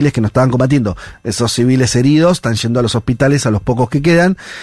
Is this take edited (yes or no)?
no